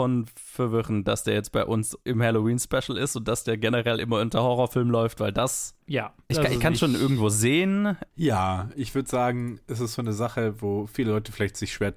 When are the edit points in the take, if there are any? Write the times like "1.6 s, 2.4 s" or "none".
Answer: 8.1 s